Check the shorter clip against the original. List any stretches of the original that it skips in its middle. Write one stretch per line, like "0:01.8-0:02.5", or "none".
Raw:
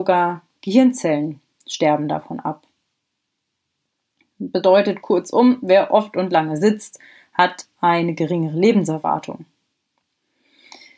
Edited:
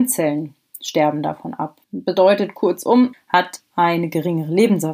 0:02.7-0:04.3
0:05.6-0:07.2